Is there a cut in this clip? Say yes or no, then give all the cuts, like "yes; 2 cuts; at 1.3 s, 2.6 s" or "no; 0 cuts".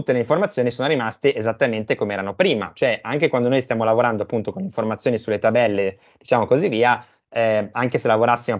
no; 0 cuts